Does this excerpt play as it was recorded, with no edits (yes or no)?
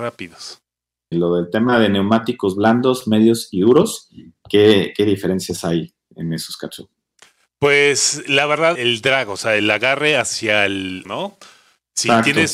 no